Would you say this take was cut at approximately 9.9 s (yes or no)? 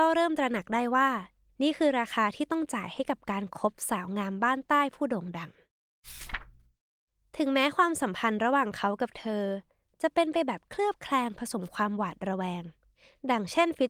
no